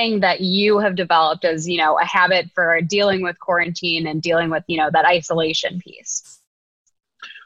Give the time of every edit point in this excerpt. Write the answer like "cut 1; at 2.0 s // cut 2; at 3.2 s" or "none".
none